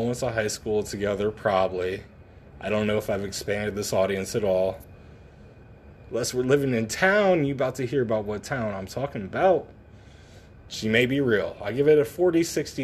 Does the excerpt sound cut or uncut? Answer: cut